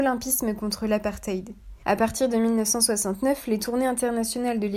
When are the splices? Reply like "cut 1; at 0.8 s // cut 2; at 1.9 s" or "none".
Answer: cut 1; at 1.8 s